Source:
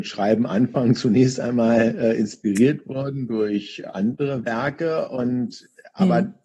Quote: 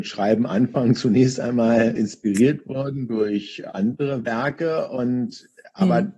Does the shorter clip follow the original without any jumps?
no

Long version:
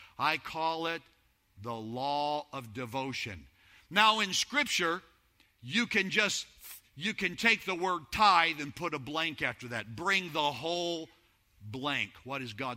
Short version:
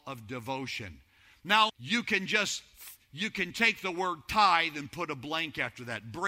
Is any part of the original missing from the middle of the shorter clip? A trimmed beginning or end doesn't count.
yes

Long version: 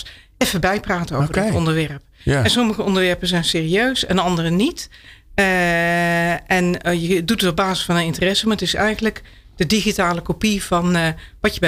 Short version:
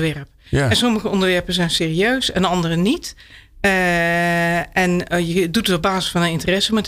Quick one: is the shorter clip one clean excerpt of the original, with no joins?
yes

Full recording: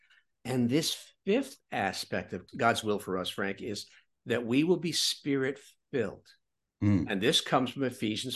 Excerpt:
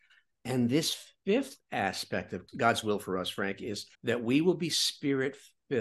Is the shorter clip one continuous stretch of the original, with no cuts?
no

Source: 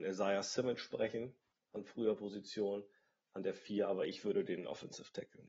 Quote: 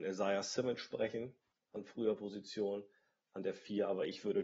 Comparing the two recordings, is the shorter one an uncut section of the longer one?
yes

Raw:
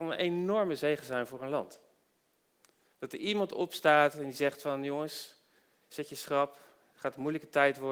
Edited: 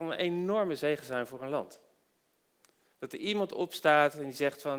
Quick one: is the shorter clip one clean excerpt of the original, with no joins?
yes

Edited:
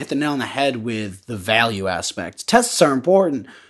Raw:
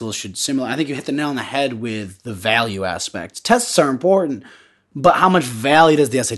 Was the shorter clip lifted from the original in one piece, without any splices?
yes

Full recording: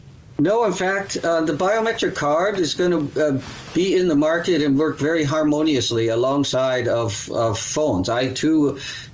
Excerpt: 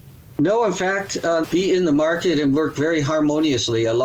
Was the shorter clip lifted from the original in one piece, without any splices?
no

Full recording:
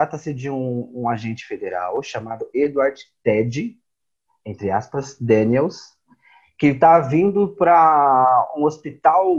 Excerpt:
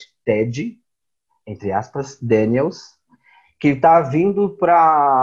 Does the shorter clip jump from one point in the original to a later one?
no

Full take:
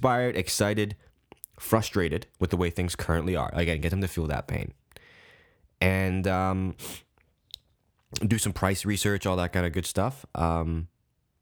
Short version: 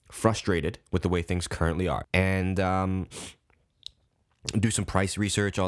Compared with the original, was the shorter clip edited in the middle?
yes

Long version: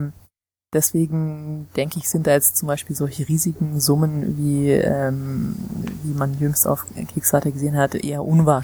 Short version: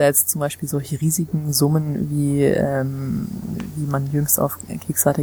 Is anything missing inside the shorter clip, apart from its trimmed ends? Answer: no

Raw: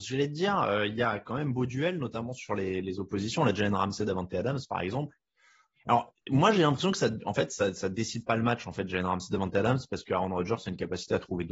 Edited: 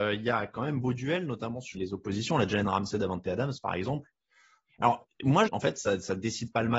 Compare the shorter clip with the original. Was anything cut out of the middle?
yes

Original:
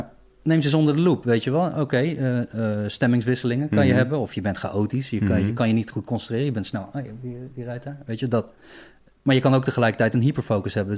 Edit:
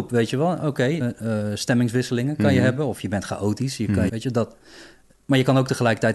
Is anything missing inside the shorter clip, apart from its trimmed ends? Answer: yes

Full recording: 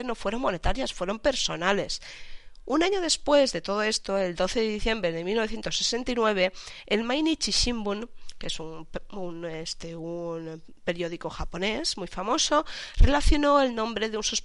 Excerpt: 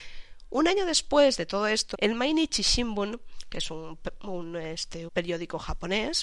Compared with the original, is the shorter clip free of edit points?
no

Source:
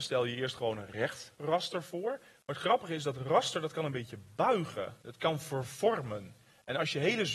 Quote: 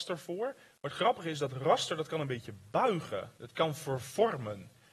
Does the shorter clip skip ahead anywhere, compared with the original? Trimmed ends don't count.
no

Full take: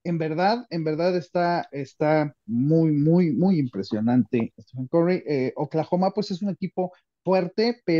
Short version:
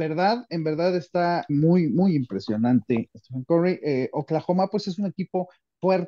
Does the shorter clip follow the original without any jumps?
no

